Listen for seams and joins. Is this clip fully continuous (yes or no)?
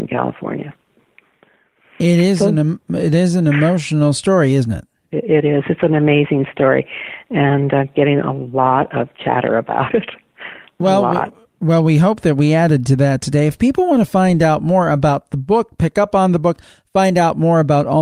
yes